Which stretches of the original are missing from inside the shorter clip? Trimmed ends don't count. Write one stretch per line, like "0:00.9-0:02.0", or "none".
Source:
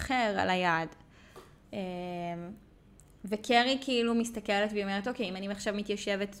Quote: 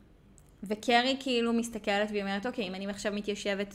none